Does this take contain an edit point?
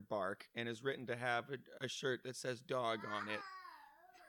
yes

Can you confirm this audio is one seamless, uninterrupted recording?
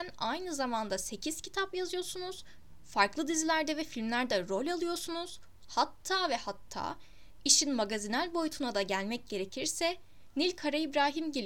yes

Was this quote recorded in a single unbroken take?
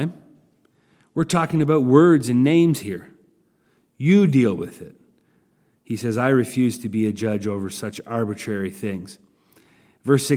yes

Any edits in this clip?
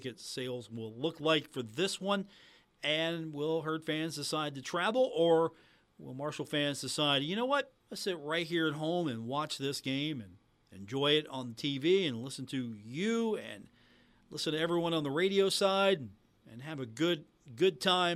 yes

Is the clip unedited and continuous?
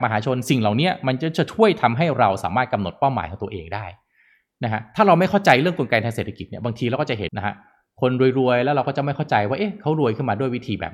no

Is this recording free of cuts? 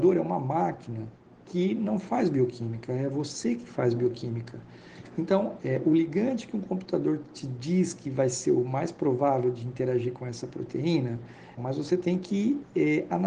no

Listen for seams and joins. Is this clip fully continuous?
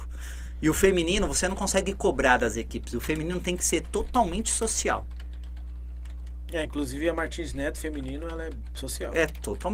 yes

